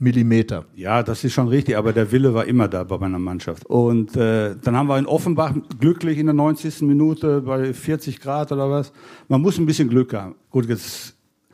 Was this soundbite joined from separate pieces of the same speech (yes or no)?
yes